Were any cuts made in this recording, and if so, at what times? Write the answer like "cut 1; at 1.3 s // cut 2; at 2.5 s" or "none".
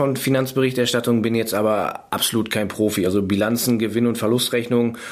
none